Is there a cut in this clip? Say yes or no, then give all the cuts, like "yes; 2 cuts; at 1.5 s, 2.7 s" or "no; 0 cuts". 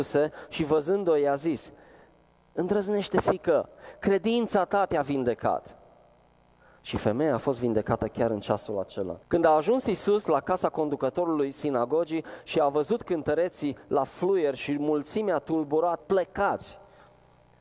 yes; 2 cuts; at 9.2 s, 16.0 s